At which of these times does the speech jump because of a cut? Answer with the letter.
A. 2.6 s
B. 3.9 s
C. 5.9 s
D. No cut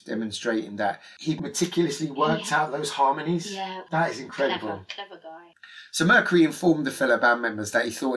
B